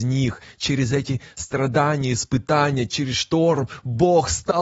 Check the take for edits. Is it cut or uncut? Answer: uncut